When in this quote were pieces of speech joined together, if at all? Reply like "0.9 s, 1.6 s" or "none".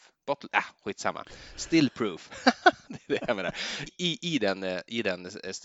3.9 s